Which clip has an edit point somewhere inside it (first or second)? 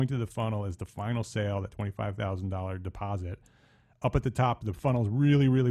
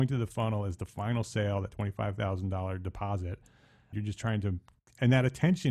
second